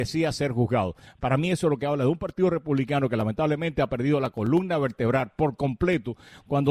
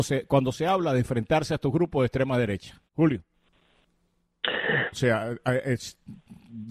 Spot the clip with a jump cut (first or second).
second